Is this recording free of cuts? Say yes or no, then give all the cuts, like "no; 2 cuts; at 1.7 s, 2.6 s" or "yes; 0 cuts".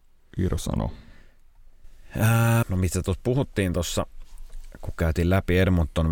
no; 1 cut; at 2.6 s